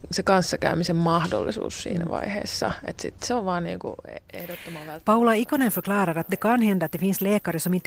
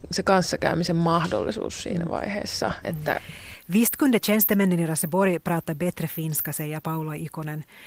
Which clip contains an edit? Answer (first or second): second